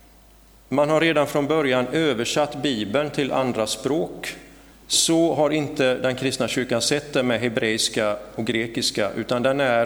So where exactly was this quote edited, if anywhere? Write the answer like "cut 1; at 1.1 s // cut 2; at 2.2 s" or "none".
cut 1; at 4.7 s